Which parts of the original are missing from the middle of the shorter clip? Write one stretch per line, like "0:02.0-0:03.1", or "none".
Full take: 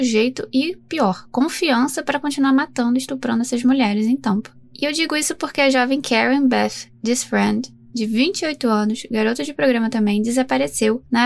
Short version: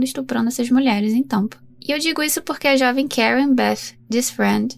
none